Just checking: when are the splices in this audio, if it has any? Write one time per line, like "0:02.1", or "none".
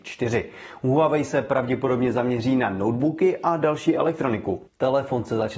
0:04.7